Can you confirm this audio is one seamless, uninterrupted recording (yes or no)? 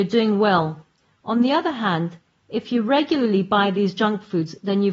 yes